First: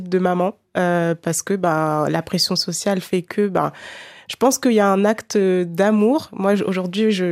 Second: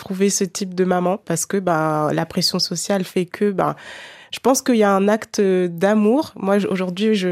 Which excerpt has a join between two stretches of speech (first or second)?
second